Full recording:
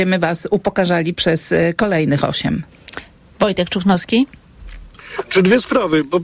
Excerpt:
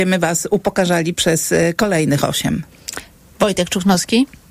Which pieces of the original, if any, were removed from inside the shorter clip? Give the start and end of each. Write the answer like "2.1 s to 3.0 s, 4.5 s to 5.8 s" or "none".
none